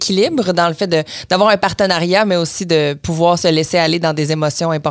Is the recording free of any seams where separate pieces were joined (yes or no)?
yes